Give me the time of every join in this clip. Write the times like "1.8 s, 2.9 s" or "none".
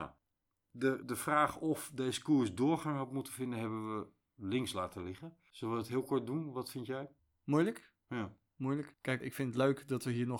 1.0 s, 8.0 s, 9.2 s